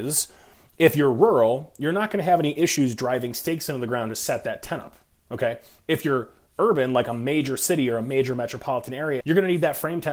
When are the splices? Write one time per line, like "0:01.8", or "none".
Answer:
0:09.2